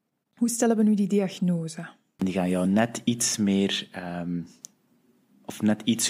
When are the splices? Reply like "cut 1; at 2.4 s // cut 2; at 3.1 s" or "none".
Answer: cut 1; at 2.2 s